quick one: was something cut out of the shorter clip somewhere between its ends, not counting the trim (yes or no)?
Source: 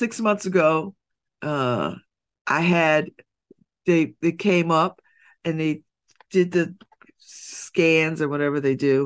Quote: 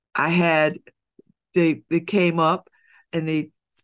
no